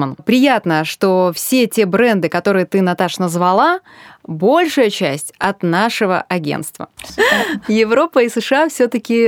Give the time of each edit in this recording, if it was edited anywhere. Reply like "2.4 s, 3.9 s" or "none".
7.1 s